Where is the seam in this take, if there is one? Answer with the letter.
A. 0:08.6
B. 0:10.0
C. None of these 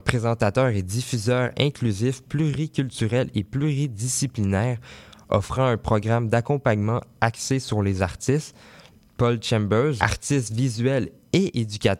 B